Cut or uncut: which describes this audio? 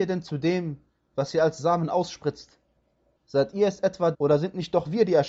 cut